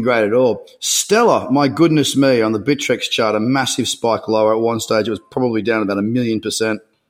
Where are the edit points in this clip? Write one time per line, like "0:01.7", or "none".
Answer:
none